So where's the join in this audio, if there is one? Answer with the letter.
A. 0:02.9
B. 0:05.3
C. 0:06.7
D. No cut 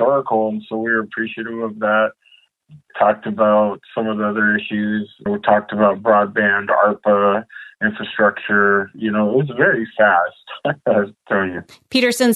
B